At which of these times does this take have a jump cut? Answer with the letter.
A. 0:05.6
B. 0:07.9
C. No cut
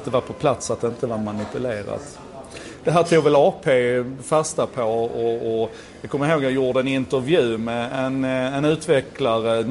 C